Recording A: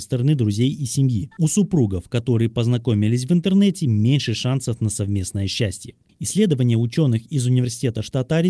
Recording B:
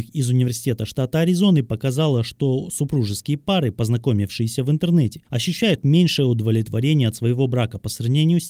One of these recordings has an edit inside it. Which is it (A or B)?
A